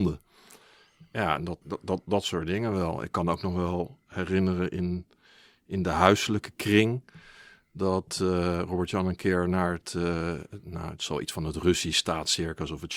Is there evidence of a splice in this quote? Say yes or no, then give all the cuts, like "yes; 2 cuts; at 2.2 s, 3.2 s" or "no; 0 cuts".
yes; 1 cut; at 1.6 s